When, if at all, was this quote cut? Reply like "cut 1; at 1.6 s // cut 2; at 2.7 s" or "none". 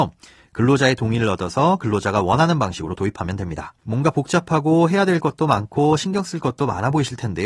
cut 1; at 3.8 s